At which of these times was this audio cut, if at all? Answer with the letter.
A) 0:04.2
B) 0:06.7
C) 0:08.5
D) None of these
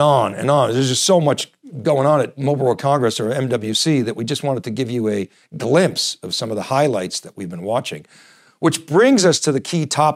D